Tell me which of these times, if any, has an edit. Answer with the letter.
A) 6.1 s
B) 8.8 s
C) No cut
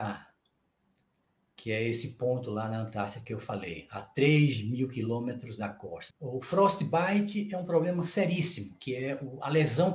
A